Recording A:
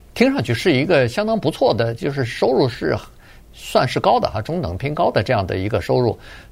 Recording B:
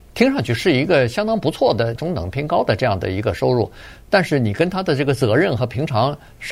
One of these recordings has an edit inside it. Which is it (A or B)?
B